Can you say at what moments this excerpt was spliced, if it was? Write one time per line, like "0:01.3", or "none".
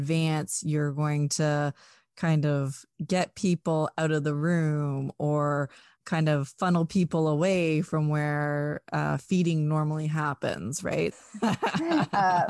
0:02.9
0:11.1